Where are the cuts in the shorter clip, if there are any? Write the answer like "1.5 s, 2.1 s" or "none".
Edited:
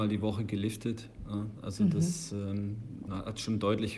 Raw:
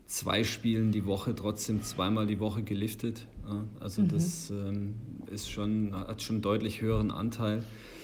3.1 s